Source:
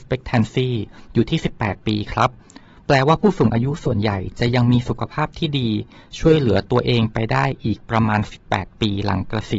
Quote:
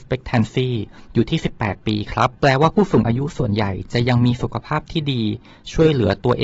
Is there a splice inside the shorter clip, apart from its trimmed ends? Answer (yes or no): yes